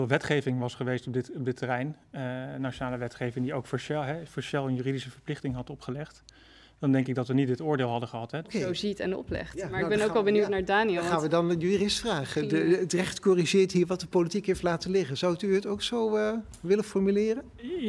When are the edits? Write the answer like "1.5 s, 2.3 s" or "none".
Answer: 8.4 s